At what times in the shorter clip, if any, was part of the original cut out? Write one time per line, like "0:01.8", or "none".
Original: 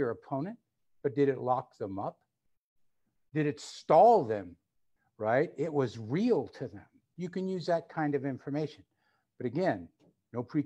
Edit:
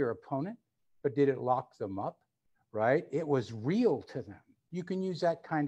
0:02.5

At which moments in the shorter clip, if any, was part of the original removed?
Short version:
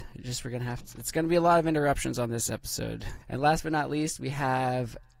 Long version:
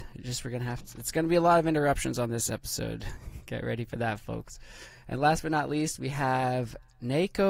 0:03.2

